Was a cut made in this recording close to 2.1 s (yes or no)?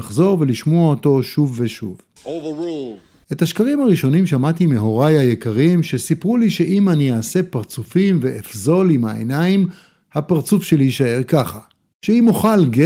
no